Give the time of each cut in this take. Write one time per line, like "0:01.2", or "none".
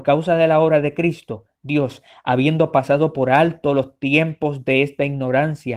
none